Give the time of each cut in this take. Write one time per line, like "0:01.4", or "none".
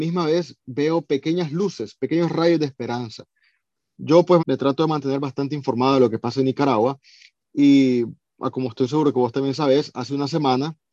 0:04.4